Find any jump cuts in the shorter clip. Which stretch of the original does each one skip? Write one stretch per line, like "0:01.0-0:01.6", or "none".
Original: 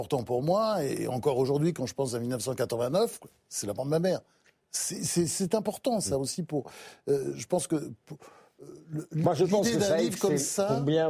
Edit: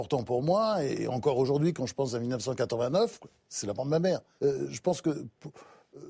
0:04.4-0:07.0